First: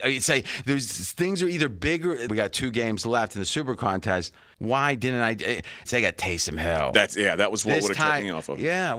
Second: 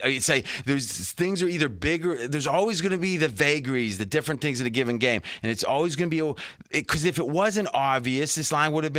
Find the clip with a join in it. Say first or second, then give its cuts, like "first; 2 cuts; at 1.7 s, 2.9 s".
first; 3 cuts; at 2.3 s, 4.5 s, 5.9 s